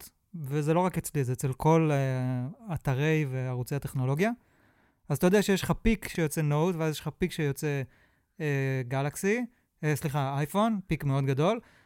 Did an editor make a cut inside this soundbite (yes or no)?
no